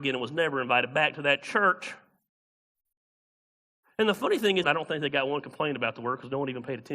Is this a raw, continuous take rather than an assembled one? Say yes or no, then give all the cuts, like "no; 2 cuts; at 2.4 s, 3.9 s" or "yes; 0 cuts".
no; 1 cut; at 4.6 s